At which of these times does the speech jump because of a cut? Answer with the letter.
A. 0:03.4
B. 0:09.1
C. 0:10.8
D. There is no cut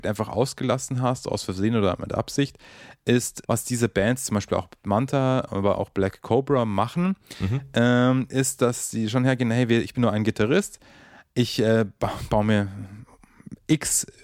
A